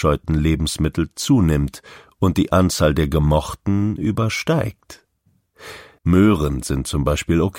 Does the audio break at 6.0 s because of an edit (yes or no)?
yes